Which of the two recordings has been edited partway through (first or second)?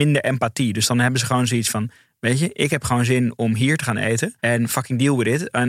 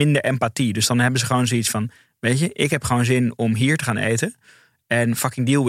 first